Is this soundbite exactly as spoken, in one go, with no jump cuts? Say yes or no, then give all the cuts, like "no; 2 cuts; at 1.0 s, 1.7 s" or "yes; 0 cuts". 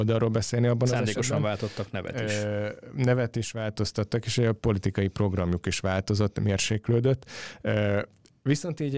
yes; 0 cuts